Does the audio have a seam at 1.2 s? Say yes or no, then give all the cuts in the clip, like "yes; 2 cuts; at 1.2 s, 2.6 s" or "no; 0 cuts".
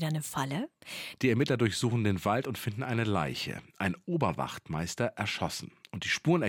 yes; 1 cut; at 1.2 s